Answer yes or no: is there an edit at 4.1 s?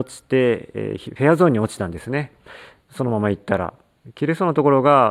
no